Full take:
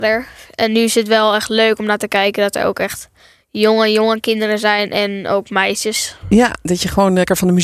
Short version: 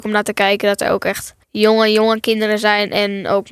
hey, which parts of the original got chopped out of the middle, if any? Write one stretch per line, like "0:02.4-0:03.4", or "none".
0:03.2-0:03.4